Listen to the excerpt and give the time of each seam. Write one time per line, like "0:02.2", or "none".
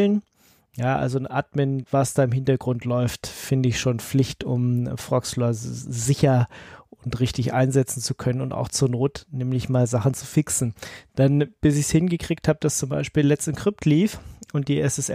0:01.8